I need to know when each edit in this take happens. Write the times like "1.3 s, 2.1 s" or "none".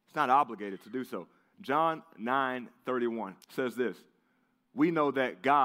1.5 s, 3.4 s